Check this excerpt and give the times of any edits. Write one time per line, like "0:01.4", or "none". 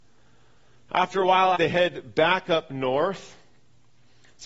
0:01.5